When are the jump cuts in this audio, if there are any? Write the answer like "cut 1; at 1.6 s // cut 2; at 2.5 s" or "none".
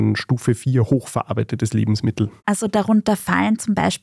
cut 1; at 2.4 s